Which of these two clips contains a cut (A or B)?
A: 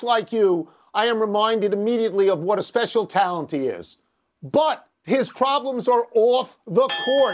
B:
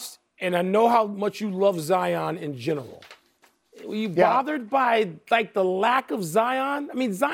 A